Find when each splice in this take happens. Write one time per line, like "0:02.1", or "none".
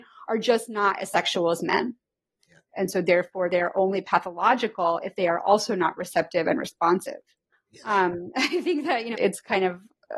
0:02.7
0:07.5
0:09.1

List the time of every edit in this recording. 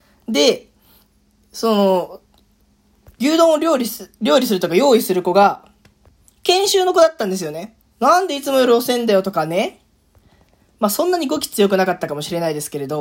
0:07.8

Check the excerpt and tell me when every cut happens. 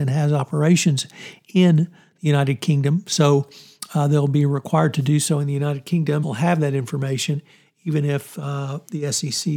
0:06.2

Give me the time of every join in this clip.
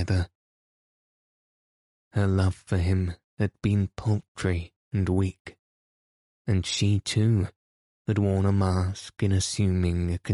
0:06.4

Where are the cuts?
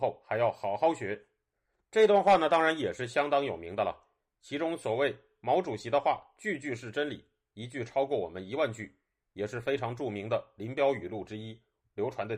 none

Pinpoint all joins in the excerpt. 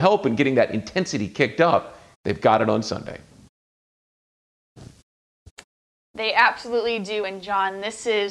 none

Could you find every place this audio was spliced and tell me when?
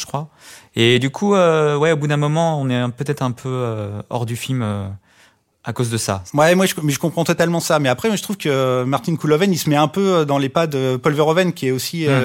none

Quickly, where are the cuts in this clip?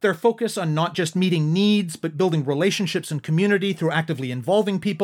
none

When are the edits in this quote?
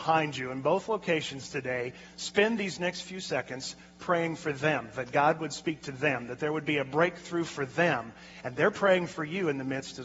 none

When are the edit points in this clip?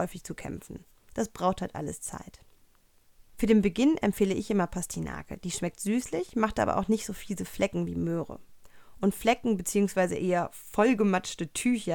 none

